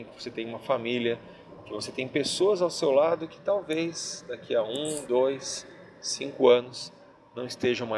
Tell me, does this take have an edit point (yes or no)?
no